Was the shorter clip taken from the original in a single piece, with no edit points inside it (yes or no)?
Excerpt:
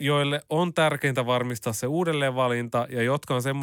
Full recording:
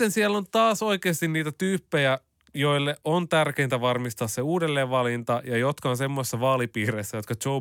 yes